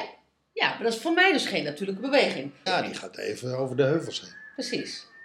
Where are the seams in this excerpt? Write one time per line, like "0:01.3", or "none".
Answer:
0:02.7